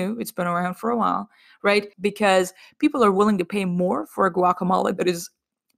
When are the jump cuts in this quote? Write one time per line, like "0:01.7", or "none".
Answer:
0:01.9